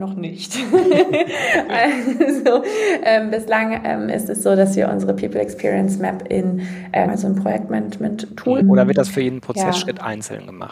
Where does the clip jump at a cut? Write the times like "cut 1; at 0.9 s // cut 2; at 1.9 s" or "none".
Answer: cut 1; at 7.1 s // cut 2; at 8.6 s